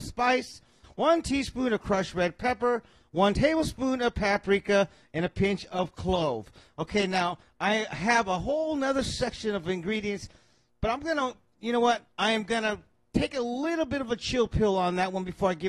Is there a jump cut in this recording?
no; 0 cuts

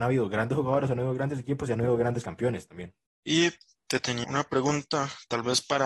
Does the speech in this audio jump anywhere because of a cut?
yes; 2 cuts; at 3.2 s, 4.2 s

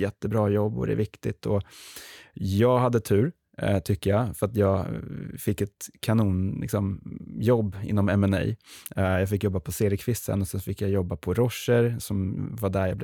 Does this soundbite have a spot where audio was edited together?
no; 0 cuts

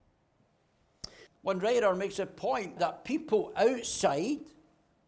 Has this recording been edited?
yes; 2 cuts; at 1.3 s, 2.8 s

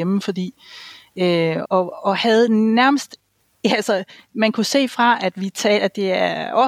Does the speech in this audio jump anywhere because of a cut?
yes; 1 cut; at 1.6 s

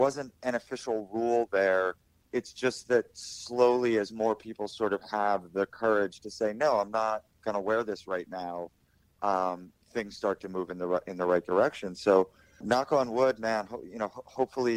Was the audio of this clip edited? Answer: yes; 1 cut; at 12.6 s

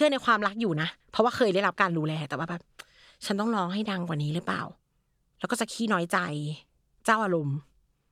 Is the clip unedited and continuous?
no; 1 cut; at 1.0 s

